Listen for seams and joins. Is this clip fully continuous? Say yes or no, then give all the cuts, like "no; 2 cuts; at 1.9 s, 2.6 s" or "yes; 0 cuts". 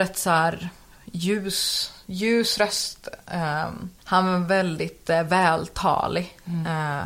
no; 1 cut; at 4.0 s